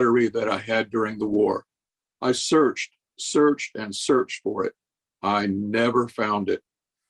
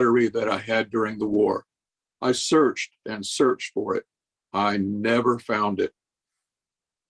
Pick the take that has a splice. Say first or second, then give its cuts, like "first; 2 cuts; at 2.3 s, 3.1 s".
second; 1 cut; at 3.0 s